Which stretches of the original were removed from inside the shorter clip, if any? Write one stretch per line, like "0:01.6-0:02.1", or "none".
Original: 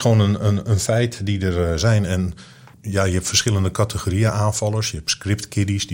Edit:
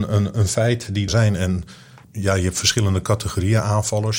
0:01.4-0:01.8